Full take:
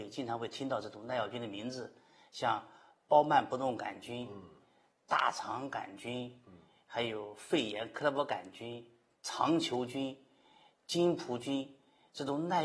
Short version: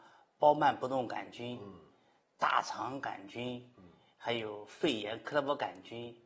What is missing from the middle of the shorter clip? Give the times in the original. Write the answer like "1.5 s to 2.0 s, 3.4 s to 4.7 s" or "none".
none